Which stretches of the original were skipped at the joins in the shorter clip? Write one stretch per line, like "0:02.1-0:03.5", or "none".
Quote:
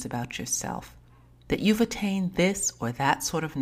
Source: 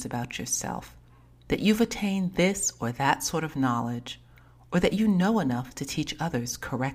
none